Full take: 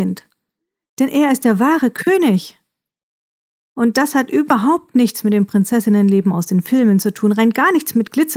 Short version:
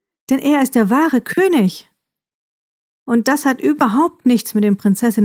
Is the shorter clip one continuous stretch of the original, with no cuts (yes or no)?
yes